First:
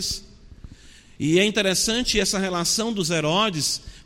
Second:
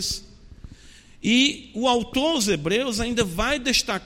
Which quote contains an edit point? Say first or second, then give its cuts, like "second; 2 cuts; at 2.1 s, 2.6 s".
first; 1 cut; at 1.2 s